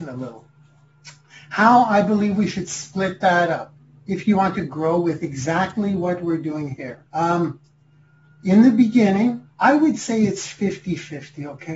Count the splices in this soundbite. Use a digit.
2